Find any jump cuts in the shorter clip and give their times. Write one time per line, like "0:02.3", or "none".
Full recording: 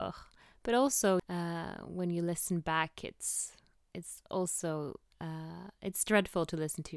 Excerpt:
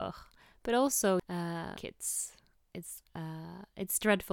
0:01.8
0:03.0